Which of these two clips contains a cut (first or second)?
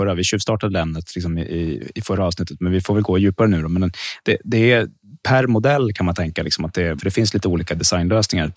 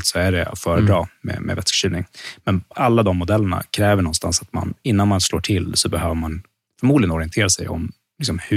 first